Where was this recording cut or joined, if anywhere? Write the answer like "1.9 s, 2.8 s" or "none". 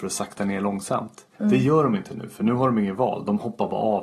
1.3 s